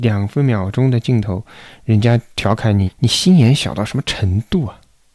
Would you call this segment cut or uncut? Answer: cut